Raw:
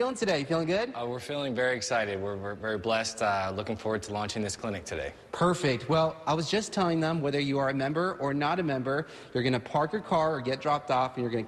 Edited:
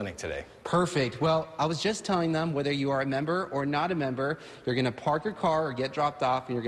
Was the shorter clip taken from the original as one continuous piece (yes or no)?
yes